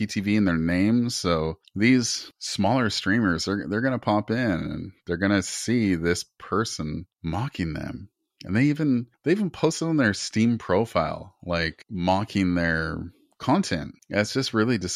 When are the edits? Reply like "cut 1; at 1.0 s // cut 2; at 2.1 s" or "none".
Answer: none